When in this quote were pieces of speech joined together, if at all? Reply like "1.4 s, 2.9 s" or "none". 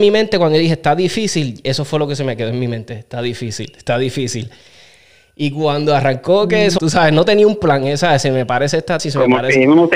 6.8 s, 9.0 s

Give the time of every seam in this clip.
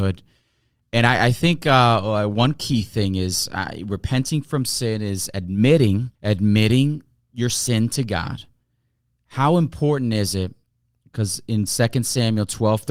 6.1 s

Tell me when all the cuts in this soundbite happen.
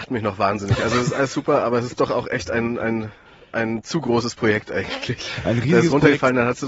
none

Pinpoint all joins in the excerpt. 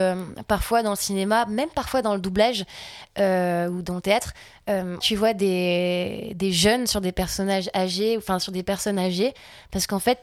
5.0 s

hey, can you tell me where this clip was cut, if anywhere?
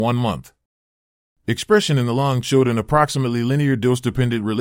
none

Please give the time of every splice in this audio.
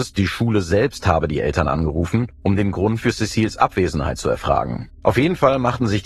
4.9 s

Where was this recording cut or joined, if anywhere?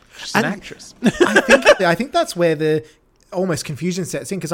1.8 s

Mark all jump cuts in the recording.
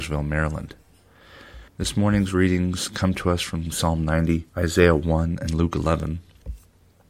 1.7 s, 4.5 s

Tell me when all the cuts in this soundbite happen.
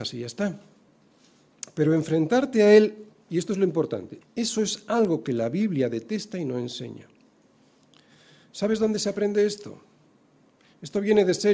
4.2 s

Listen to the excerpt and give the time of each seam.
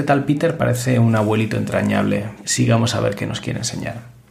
2.4 s

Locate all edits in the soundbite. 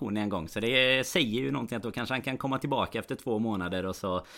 none

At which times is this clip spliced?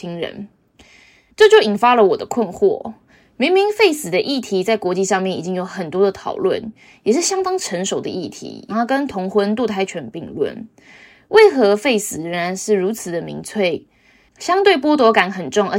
8.7 s

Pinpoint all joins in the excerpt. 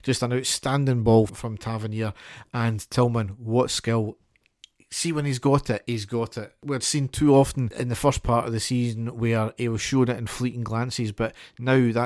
1.3 s

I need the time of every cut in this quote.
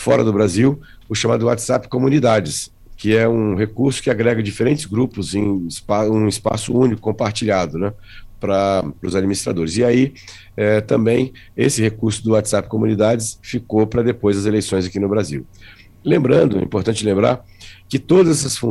none

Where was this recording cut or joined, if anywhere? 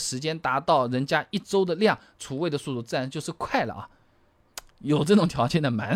none

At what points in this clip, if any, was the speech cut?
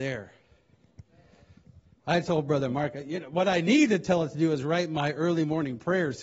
2.0 s

